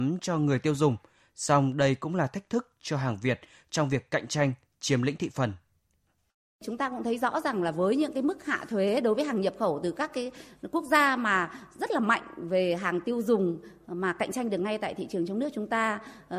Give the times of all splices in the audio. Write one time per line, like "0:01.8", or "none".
none